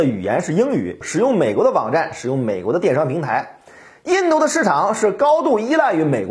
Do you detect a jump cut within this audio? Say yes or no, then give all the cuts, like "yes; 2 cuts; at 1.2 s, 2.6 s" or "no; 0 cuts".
yes; 1 cut; at 1.0 s